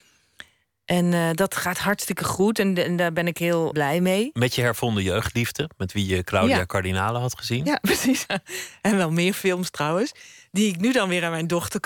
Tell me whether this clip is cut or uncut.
cut